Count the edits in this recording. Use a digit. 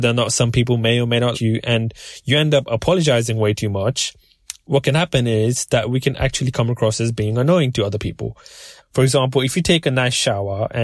2